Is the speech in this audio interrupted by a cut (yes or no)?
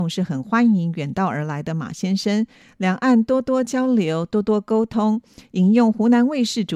no